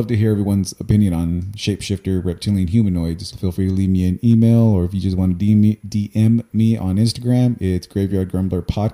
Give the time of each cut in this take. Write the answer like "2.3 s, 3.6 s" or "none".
3.3 s